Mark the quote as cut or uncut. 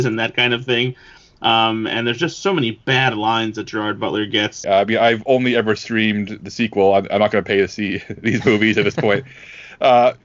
cut